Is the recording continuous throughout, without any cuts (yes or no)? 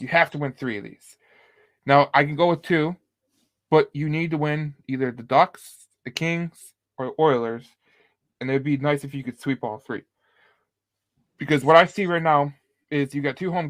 yes